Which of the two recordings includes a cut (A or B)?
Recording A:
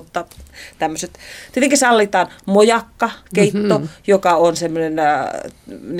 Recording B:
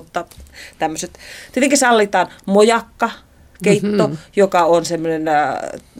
A